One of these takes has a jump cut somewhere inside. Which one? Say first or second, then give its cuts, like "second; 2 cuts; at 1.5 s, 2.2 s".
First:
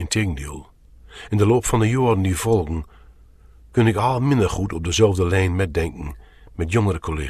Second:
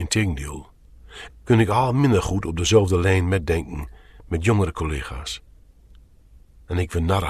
second; 1 cut; at 1.3 s